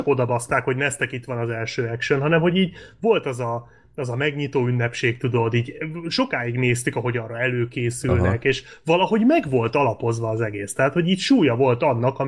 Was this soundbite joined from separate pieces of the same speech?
no; 0 cuts

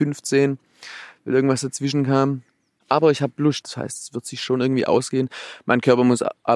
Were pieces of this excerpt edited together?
yes; 1 cut; at 3.6 s

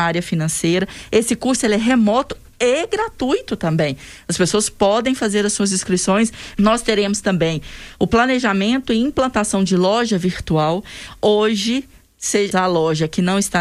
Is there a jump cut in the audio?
yes; 2 cuts; at 6.5 s, 12.5 s

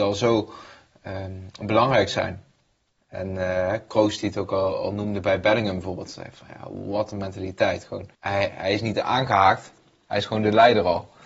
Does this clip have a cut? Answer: yes; 1 cut; at 8.1 s

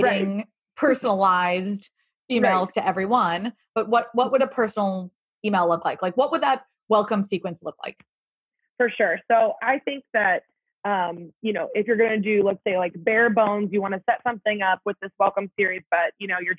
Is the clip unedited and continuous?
yes; 0 cuts

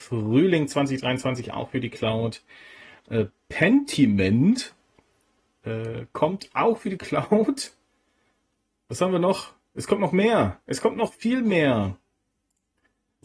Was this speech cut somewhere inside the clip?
yes; 1 cut; at 3.0 s

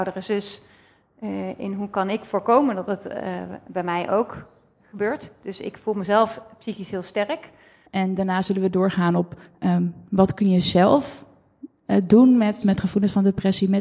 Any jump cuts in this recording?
yes; 2 cuts; at 7.9 s, 12.6 s

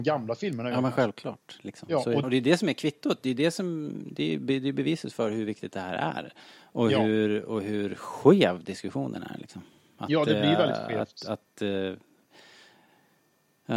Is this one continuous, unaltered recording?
no; 1 cut; at 2.2 s

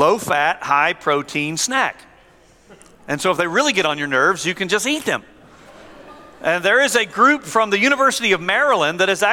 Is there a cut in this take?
no; 0 cuts

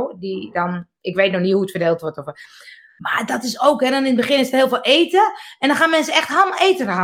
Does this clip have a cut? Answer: no; 0 cuts

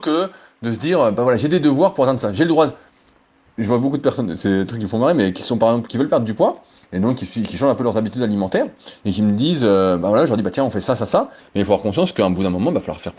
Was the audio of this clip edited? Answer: yes; 1 cut; at 11.4 s

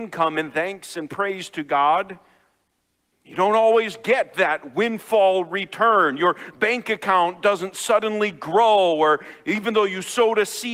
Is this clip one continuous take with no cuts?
yes; 0 cuts

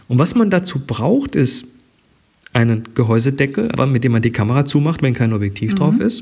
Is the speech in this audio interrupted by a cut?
yes; 1 cut; at 3.7 s

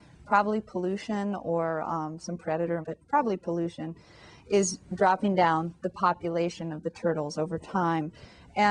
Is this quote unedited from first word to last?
no; 1 cut; at 2.8 s

